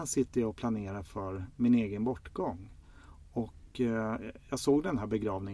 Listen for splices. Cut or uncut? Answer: uncut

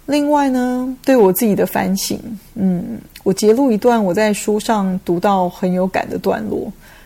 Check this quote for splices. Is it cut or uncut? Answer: uncut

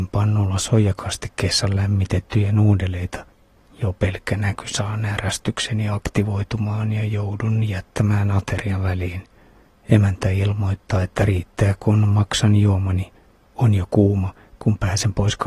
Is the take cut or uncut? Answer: cut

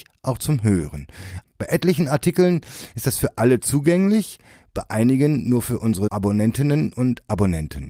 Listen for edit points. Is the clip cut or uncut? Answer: cut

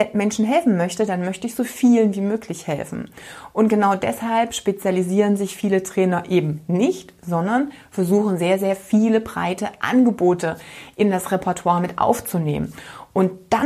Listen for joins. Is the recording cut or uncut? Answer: uncut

